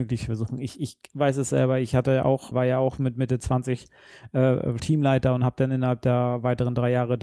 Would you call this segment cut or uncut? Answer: cut